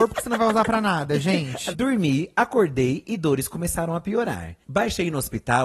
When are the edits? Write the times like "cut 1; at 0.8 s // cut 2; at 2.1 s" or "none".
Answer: cut 1; at 1.7 s